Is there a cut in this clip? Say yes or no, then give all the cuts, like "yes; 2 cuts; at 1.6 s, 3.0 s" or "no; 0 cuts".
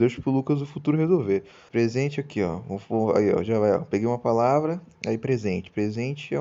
yes; 1 cut; at 1.7 s